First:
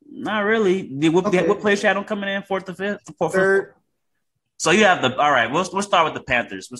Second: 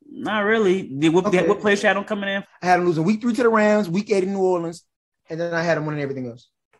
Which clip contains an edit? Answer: second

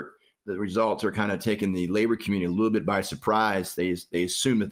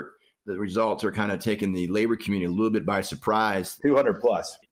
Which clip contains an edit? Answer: second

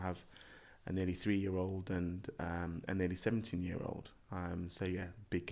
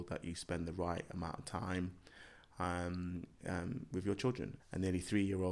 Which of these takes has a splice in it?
second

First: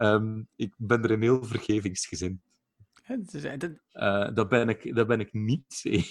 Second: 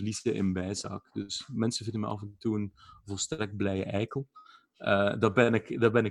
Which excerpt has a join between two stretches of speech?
first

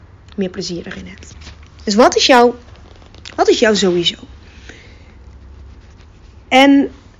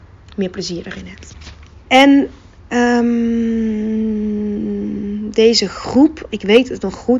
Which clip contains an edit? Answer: second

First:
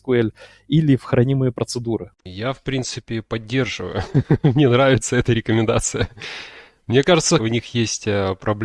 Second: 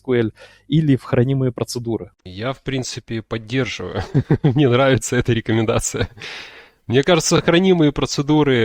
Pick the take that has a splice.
first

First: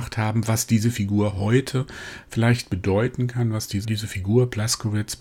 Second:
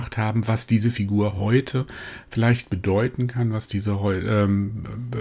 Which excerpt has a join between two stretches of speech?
first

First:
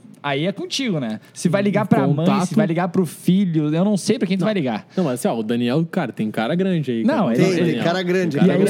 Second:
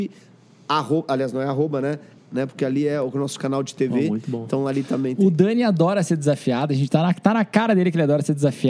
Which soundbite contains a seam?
second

